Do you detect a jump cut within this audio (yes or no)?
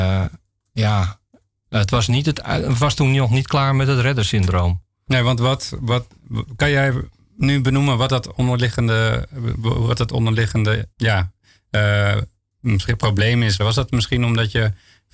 yes